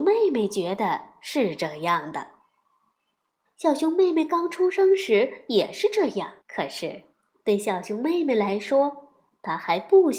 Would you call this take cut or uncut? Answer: cut